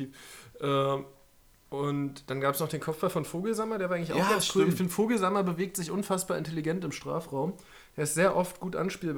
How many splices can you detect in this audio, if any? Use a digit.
0